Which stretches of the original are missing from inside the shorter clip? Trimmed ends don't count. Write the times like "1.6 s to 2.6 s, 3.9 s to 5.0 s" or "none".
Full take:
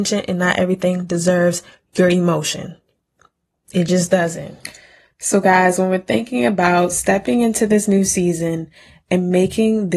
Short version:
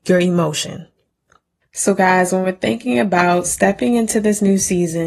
3.5 s to 5.1 s